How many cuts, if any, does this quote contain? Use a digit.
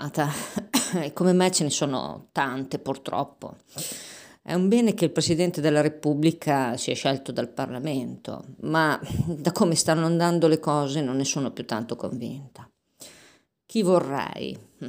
0